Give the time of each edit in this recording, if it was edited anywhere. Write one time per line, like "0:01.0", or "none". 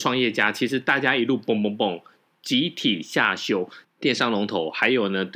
0:03.8